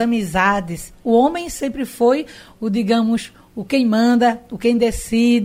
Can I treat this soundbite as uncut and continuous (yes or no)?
yes